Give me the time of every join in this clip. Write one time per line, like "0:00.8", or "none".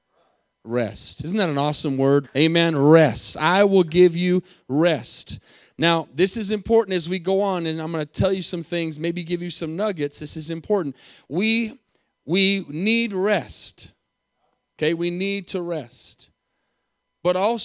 0:02.2